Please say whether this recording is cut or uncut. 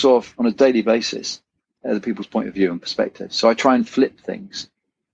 cut